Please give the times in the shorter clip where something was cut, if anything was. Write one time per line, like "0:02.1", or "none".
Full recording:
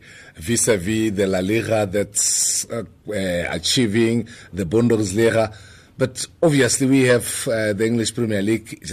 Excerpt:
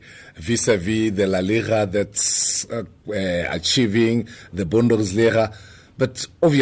none

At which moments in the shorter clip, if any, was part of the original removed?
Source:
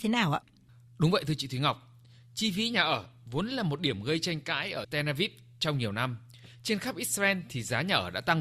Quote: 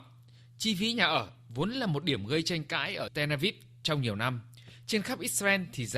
none

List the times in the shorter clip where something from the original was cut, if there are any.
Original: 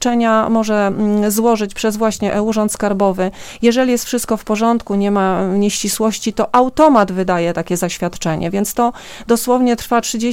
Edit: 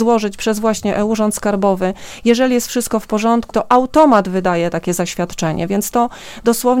0:03.5

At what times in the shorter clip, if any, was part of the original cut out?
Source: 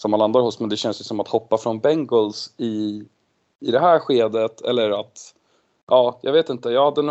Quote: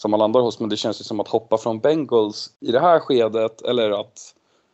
0:02.6

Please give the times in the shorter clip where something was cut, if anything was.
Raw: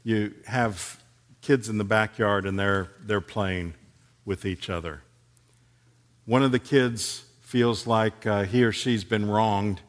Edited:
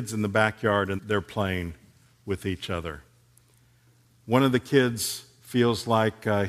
0:01.0

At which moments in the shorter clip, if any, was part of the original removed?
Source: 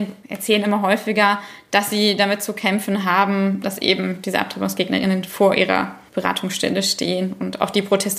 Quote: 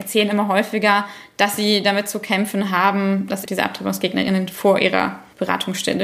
0:03.5

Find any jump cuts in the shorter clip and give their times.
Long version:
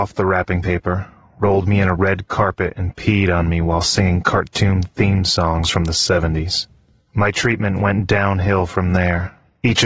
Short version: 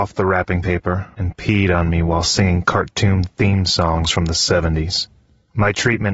0:01.1

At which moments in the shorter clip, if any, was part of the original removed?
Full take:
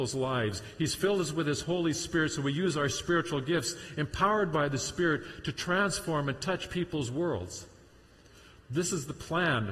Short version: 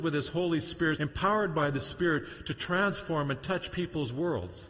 0:01.0

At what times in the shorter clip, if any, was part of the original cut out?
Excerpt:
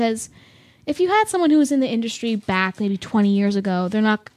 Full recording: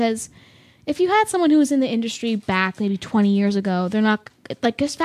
none

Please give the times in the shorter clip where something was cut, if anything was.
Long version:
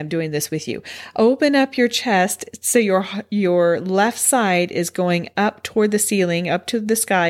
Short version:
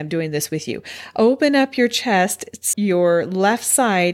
0:02.7

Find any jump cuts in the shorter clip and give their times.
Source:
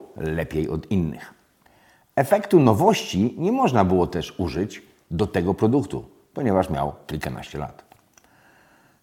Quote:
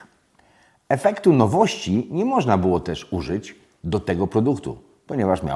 none

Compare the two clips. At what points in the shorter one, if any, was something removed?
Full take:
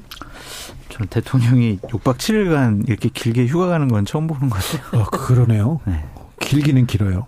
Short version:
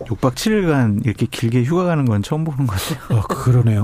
none

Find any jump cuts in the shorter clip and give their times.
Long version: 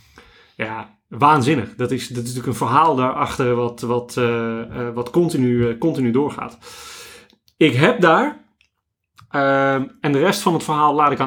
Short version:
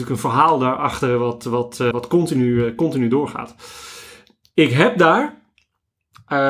0:01.9

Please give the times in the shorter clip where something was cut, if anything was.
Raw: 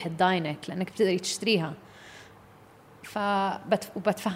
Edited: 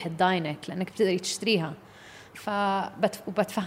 0:02.3

